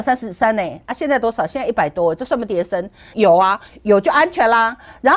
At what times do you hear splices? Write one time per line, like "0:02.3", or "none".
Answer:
0:03.1